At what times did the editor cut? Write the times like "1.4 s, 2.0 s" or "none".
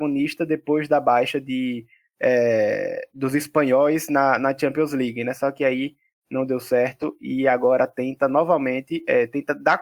none